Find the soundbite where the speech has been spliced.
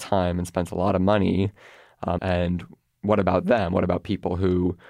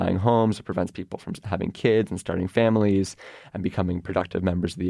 first; 1 cut; at 2.2 s

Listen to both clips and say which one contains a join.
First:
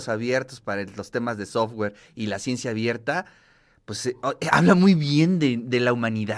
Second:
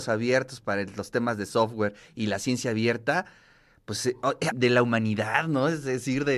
second; 1 cut; at 4.5 s

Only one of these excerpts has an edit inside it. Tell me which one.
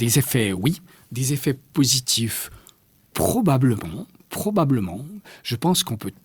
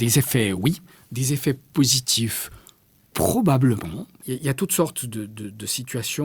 second; 1 cut; at 4.2 s

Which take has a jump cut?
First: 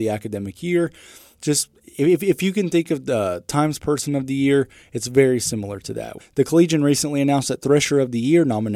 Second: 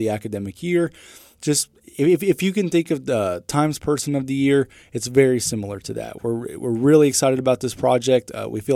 first; 1 cut; at 6.2 s

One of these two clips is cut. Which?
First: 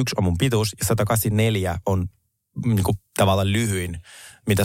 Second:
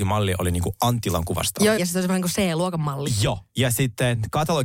second; 1 cut; at 1.8 s

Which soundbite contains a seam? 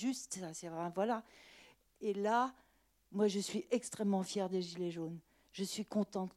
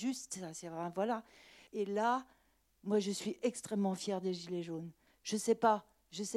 second; 2 cuts; at 1.7 s, 5.1 s

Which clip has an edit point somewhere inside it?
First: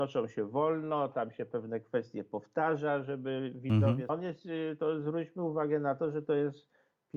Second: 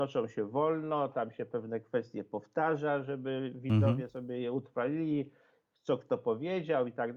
first; 1 cut; at 4.1 s

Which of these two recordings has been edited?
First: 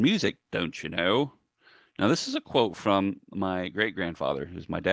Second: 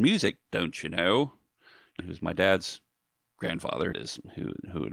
second; 2 cuts; at 2.0 s, 3.9 s

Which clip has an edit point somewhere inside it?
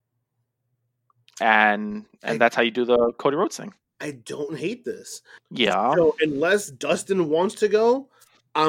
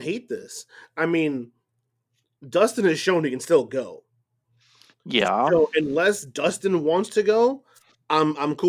first; 1 cut; at 5.4 s

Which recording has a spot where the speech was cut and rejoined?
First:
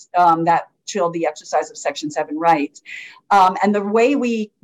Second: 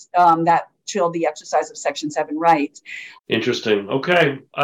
second; 1 cut; at 3.2 s

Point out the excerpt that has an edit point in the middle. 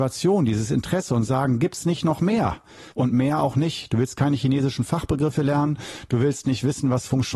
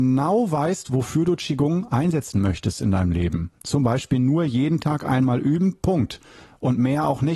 first; 1 cut; at 2.9 s

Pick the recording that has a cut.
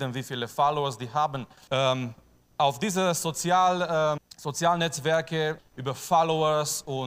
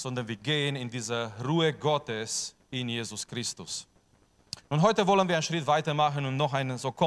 first; 3 cuts; at 1.7 s, 4.2 s, 5.6 s

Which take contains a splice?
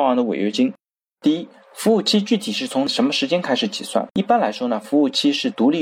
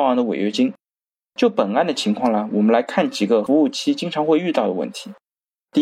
first; 2 cuts; at 1.1 s, 4.1 s

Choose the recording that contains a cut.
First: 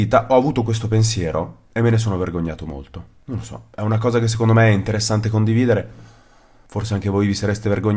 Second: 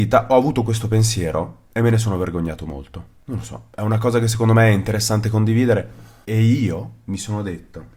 second; 1 cut; at 6.2 s

